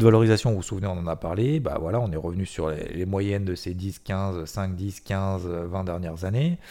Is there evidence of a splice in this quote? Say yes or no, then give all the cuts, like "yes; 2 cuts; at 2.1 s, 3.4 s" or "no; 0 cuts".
no; 0 cuts